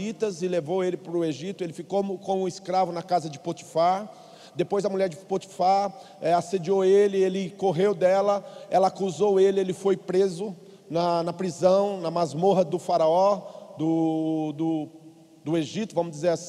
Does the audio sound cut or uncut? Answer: uncut